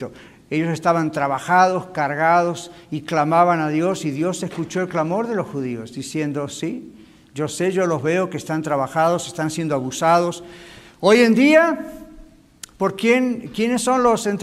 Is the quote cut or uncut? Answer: uncut